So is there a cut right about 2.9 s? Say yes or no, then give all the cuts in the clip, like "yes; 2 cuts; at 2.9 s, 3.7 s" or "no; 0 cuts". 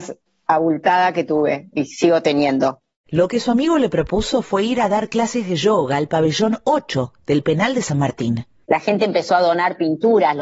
no; 1 cut; at 8.6 s